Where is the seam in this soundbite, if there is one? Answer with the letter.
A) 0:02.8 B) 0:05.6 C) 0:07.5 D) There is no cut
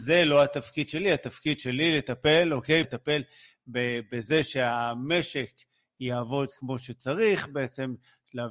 A